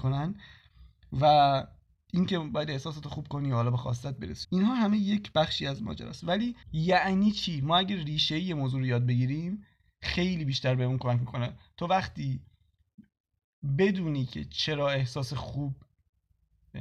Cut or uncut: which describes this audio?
cut